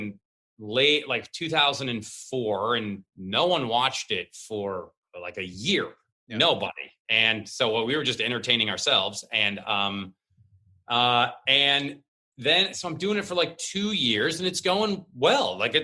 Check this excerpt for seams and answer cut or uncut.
uncut